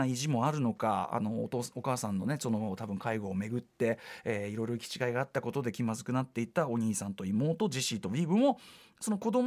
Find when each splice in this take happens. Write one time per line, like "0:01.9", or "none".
none